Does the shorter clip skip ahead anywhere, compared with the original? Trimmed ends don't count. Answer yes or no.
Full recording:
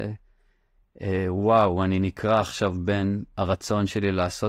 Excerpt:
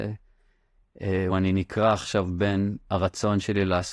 yes